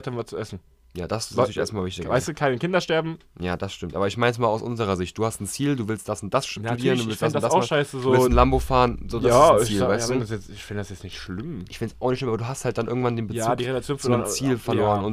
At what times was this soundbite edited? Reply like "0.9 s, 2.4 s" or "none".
none

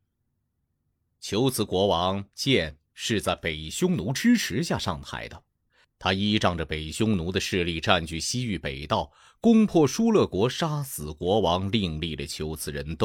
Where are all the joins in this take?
1.1 s

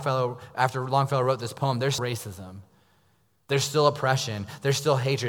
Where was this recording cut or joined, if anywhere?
2.0 s

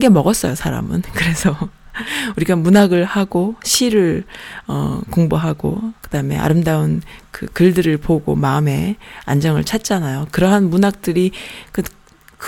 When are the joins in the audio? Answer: 6.0 s

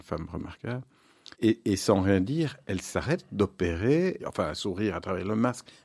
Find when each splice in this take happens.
1.3 s, 2.6 s, 4.2 s

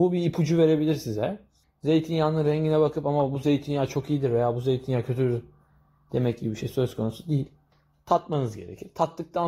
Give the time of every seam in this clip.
none

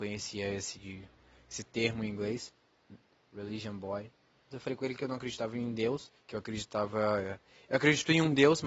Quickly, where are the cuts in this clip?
4.5 s, 6.2 s

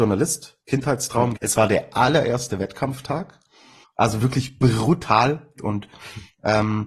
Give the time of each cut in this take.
1.4 s, 3.8 s, 5.6 s

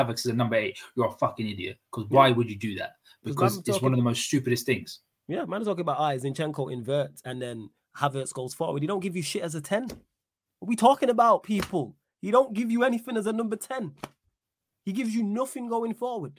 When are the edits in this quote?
none

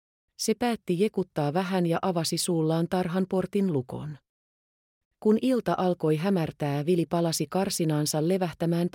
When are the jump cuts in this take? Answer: 5.0 s

